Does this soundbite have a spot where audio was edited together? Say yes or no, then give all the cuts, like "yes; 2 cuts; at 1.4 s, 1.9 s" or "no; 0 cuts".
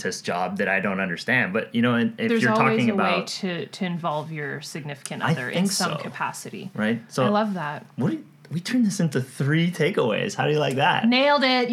no; 0 cuts